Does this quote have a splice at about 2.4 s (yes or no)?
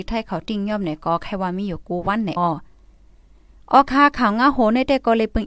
yes